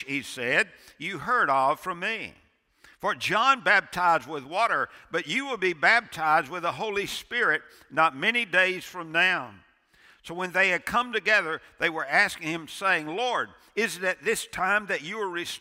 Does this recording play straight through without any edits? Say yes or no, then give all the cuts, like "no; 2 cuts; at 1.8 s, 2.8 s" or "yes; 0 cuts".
yes; 0 cuts